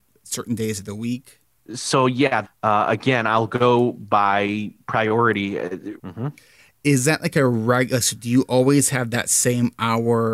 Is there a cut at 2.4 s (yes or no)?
yes